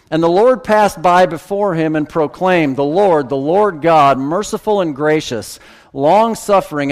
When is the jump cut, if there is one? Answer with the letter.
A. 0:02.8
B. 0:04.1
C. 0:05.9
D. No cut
D